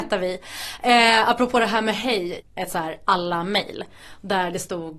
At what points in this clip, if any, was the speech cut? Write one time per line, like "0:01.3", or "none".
0:02.4